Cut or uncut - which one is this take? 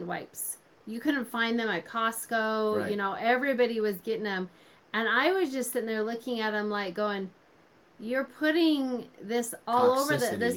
uncut